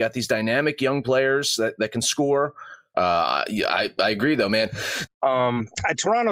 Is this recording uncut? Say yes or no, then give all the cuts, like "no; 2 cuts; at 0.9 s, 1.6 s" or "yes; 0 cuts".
no; 2 cuts; at 2.9 s, 5.1 s